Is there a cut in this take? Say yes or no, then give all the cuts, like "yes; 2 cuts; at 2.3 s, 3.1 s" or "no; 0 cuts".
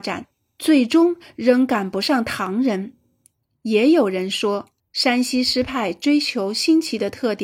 yes; 1 cut; at 4.8 s